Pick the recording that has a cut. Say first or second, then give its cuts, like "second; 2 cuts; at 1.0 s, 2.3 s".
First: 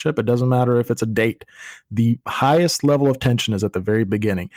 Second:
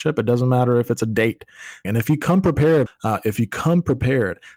second; 2 cuts; at 1.8 s, 2.9 s